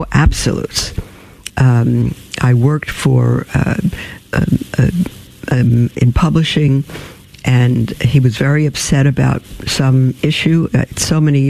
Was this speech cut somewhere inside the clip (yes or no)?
yes